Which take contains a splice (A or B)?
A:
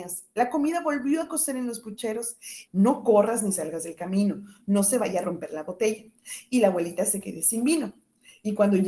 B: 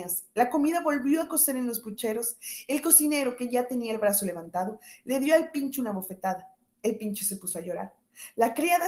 A